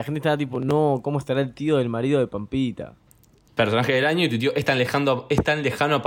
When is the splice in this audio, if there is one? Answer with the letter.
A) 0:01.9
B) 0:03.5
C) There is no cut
B